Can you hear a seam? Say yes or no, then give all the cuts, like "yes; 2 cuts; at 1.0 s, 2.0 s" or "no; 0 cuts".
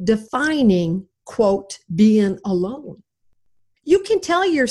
no; 0 cuts